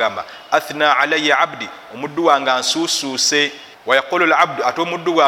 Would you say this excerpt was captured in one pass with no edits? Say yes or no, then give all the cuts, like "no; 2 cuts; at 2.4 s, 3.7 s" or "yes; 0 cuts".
no; 1 cut; at 3.7 s